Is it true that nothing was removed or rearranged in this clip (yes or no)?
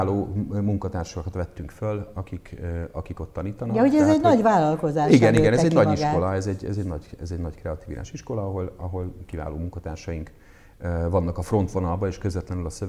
yes